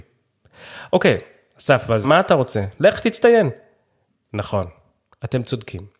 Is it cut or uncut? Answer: cut